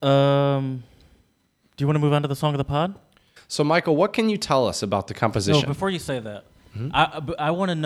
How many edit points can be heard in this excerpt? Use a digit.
1